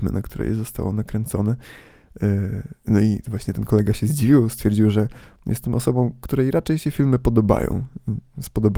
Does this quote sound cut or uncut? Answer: uncut